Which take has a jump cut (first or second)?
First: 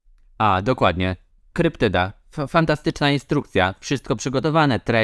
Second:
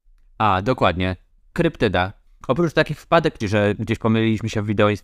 second